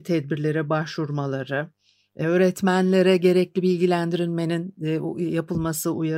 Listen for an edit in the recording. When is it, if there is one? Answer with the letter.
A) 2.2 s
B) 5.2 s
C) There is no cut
C